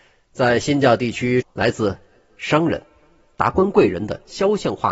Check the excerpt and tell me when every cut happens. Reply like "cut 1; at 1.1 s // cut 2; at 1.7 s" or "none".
cut 1; at 1.4 s